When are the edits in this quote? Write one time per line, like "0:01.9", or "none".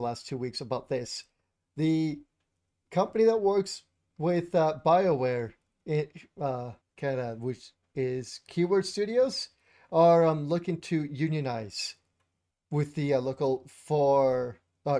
0:06.8